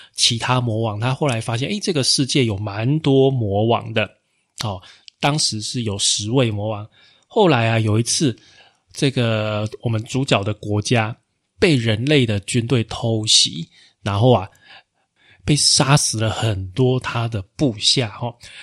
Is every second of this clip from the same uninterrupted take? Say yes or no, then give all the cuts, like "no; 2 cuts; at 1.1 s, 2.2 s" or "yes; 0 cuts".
yes; 0 cuts